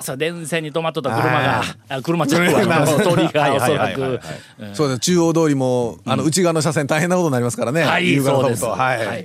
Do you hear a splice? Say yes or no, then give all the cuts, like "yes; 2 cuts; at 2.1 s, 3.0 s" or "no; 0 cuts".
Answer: no; 0 cuts